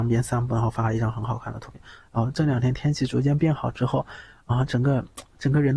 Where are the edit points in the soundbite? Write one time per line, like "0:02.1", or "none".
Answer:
0:02.0